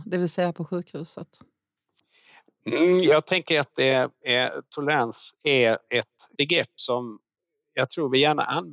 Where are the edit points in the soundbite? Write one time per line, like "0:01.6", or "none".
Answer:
none